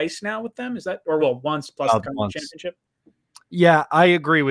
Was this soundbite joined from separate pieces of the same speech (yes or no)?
no